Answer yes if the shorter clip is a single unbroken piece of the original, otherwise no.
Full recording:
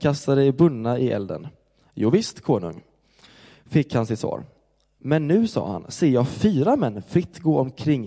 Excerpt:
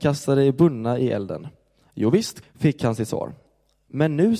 no